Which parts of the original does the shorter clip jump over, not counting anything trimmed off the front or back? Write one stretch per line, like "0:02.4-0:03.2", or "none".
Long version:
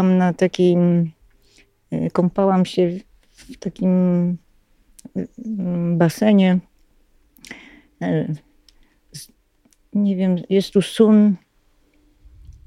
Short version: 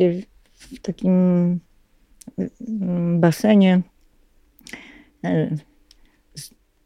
none